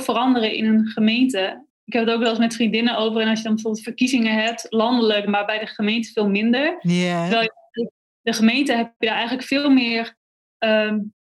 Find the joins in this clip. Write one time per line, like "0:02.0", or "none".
0:05.3